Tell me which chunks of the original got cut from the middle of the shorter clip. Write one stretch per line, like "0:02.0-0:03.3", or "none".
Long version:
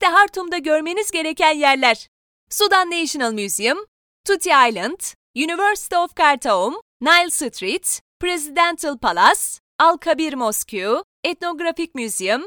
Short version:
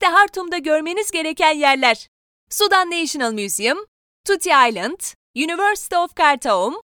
none